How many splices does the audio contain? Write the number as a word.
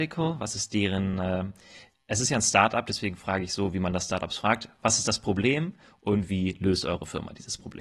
zero